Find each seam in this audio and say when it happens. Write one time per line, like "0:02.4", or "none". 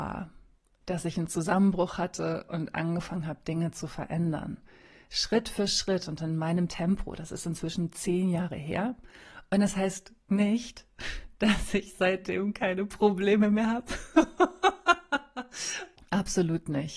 none